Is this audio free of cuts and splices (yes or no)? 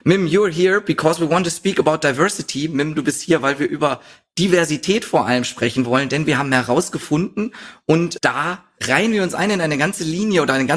yes